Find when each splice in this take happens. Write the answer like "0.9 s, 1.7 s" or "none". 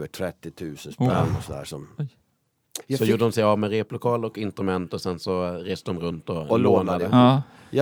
2.8 s